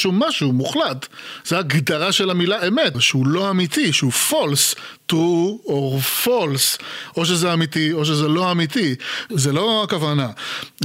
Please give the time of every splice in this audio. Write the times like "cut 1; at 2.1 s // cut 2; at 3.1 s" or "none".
cut 1; at 2.9 s // cut 2; at 9.3 s